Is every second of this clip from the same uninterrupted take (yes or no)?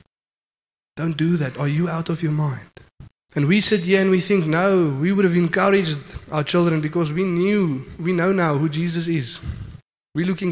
no